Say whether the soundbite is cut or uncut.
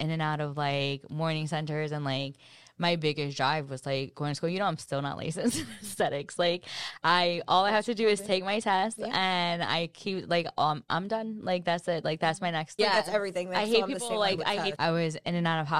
cut